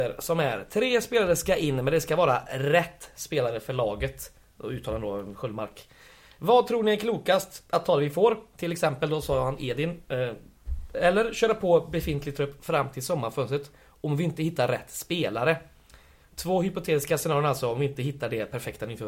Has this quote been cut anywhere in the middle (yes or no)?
no